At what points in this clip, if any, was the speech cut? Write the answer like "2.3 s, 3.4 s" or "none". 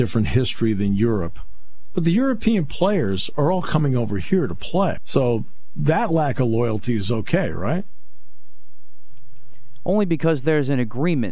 5.0 s